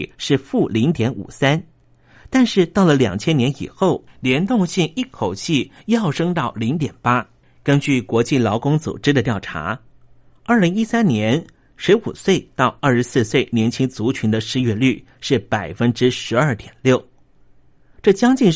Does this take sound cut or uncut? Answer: uncut